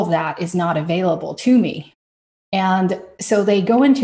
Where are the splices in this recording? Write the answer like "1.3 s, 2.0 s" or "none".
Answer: 2.3 s